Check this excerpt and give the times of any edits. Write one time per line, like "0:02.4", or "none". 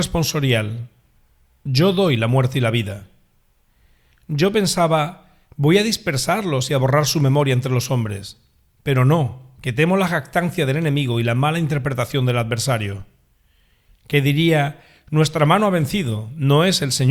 none